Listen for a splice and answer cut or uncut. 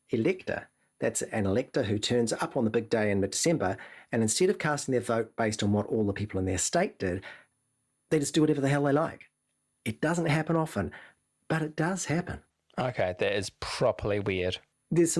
uncut